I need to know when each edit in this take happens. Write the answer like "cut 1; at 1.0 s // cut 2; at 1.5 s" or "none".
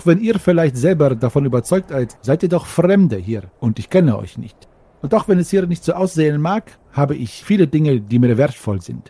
cut 1; at 2.2 s

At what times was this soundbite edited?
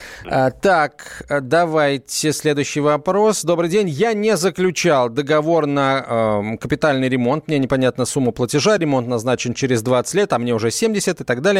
none

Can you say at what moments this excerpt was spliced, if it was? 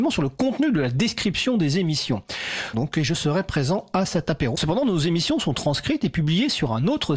cut 1; at 2.7 s // cut 2; at 4.5 s

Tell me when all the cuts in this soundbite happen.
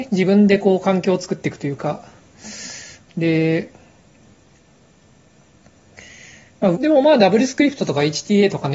cut 1; at 3.1 s // cut 2; at 6.7 s

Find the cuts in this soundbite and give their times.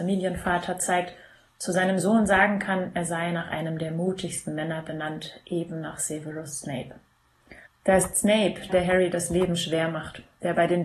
cut 1; at 7.6 s // cut 2; at 8.7 s

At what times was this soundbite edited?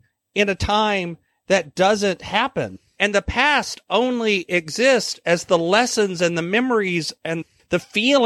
cut 1; at 3.0 s

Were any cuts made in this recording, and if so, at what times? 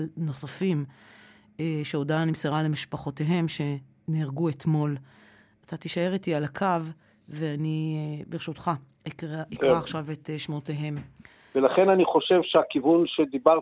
cut 1; at 11.5 s

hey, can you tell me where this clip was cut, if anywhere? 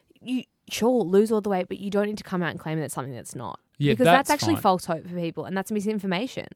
none

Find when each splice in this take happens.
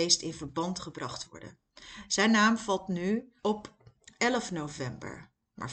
cut 1; at 3.4 s

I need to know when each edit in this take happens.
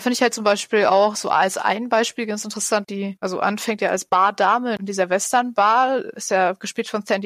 cut 1; at 2.8 s

